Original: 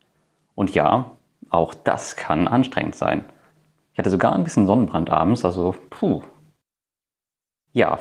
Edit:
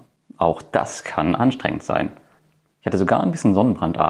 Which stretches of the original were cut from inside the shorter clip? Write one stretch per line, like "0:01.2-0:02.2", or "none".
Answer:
none